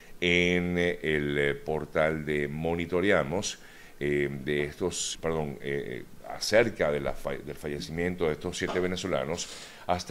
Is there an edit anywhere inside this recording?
yes; 1 cut; at 5.1 s

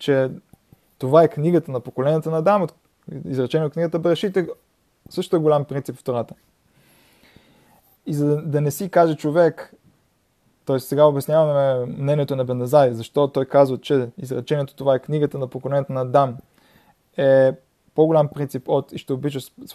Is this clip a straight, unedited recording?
yes; 0 cuts

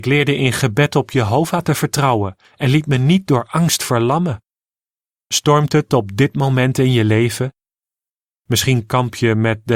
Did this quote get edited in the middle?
yes; 1 cut; at 5.2 s

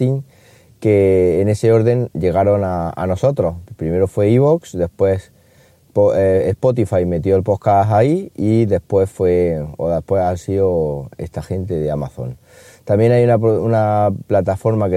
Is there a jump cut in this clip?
no; 0 cuts

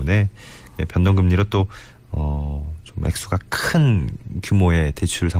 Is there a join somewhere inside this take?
no; 0 cuts

